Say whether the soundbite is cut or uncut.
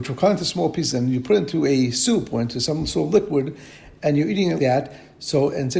cut